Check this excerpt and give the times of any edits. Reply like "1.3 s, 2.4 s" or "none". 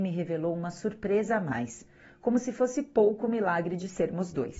none